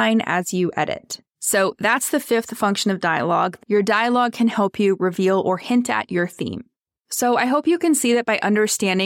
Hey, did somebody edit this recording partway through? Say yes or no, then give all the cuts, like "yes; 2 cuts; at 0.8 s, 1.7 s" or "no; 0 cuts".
no; 0 cuts